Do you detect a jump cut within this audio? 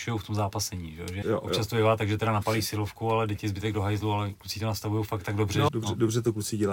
yes; 2 cuts; at 1.2 s, 5.7 s

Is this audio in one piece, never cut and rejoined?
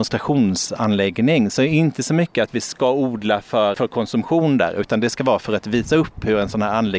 no; 1 cut; at 3.7 s

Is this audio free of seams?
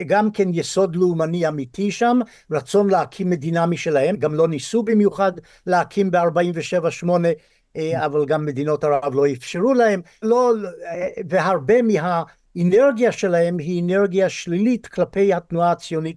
no; 2 cuts; at 4.1 s, 10.2 s

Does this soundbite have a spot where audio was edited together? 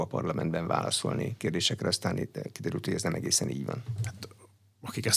no; 0 cuts

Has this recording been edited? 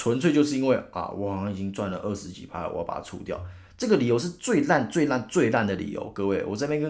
no; 0 cuts

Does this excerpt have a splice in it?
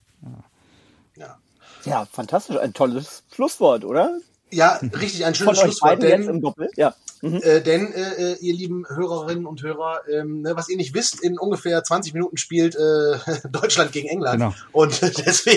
no; 0 cuts

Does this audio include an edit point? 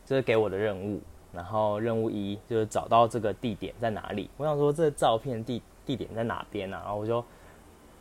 no; 0 cuts

